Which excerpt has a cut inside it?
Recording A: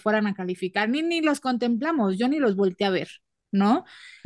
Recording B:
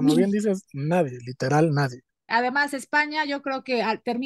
B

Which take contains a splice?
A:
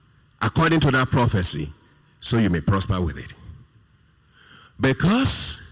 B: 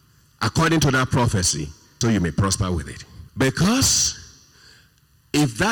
B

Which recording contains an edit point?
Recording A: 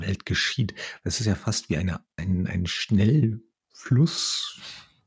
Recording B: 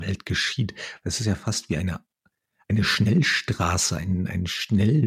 A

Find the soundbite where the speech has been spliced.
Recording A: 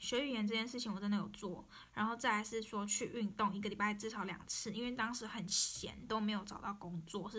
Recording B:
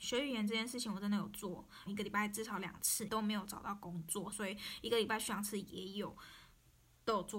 B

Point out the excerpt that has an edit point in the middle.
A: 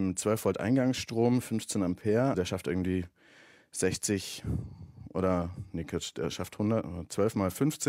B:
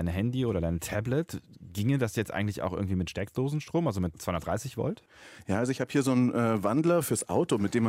A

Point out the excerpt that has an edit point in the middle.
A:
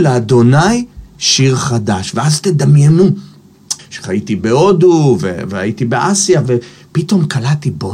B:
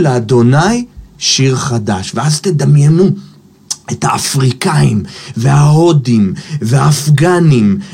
A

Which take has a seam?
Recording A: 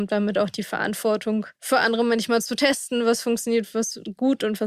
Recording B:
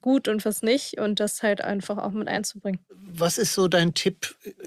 A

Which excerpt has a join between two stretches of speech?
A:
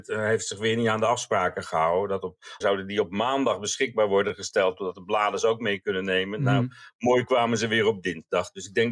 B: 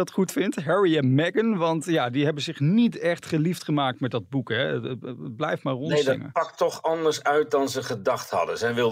A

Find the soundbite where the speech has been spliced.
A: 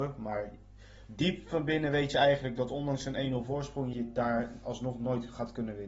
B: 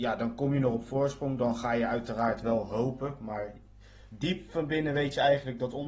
A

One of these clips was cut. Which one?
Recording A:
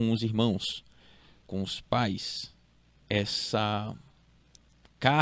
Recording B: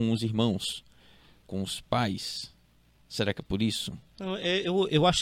A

